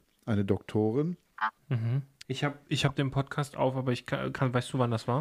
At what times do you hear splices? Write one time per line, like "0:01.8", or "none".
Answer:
0:02.2